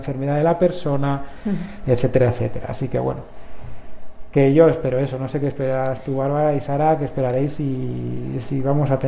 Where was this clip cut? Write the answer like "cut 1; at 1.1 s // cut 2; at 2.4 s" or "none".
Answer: none

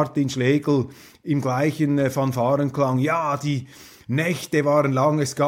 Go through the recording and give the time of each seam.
none

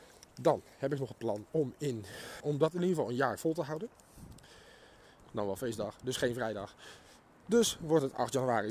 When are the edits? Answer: cut 1; at 2.4 s // cut 2; at 5.2 s

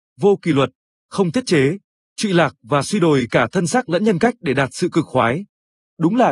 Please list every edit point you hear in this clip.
cut 1; at 2.0 s

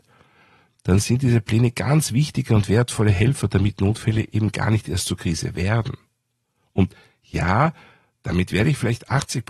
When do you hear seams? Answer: none

